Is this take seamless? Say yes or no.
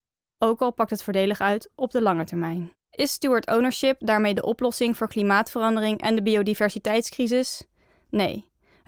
no